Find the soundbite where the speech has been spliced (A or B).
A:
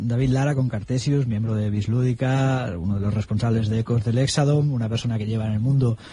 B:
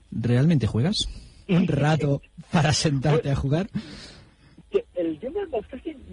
B